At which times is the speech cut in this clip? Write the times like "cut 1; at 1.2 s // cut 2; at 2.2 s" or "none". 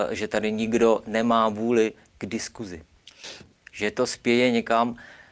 cut 1; at 3.5 s